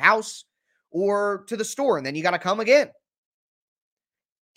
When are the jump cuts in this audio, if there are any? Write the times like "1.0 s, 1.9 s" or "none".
none